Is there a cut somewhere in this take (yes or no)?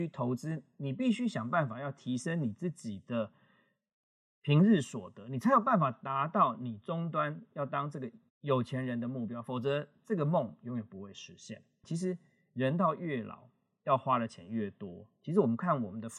yes